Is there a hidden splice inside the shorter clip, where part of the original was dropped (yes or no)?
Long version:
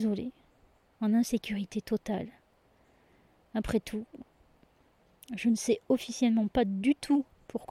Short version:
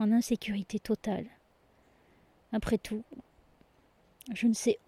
no